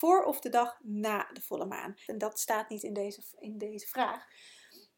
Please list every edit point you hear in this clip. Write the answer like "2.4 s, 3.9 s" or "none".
2.1 s